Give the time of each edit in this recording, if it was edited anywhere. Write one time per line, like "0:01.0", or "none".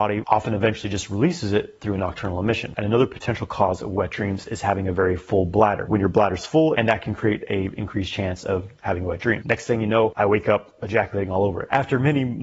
0:06.7
0:09.4